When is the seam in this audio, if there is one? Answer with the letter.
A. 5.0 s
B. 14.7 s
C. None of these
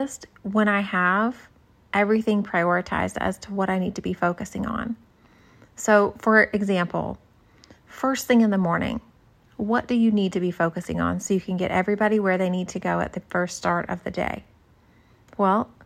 C